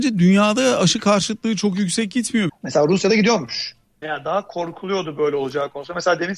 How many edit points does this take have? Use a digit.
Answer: 2